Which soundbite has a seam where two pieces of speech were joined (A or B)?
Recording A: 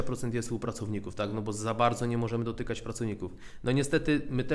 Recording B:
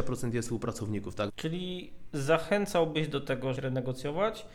B